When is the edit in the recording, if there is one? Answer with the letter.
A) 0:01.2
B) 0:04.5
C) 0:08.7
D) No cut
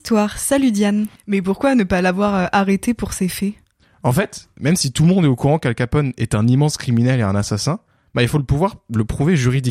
A